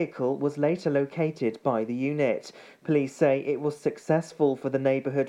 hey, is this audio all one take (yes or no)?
yes